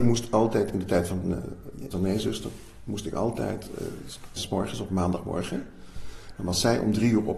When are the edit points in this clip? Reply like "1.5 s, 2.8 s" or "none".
1.9 s, 4.4 s